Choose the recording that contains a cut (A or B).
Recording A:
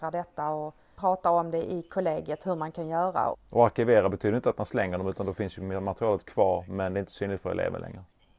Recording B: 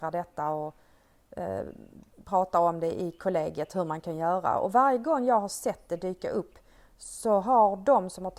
A